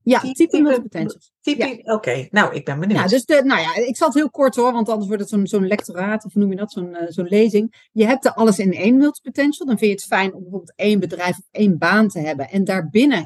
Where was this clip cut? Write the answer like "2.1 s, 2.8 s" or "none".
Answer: none